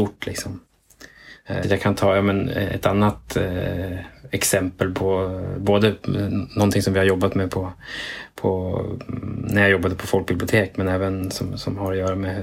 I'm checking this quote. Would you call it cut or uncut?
cut